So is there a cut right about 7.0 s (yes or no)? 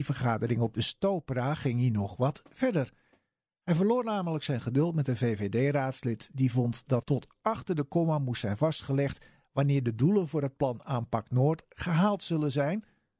yes